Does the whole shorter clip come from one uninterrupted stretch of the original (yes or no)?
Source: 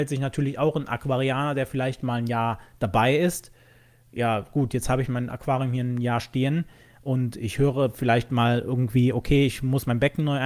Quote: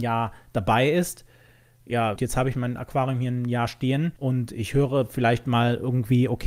no